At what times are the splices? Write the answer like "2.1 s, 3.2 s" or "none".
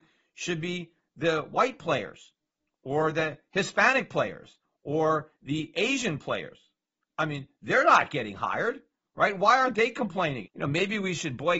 10.4 s